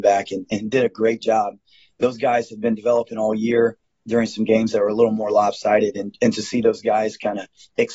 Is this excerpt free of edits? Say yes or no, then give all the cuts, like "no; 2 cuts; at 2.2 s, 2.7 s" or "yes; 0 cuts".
yes; 0 cuts